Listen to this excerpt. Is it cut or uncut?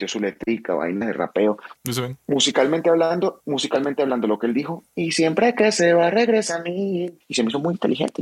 cut